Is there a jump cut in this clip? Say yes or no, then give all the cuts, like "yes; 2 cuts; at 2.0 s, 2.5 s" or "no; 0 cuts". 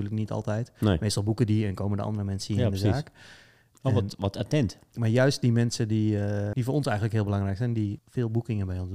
yes; 2 cuts; at 6.5 s, 8.0 s